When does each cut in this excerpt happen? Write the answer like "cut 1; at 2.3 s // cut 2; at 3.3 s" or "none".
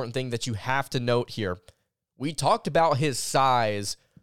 none